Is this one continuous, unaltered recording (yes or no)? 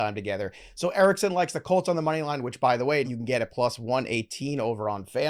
no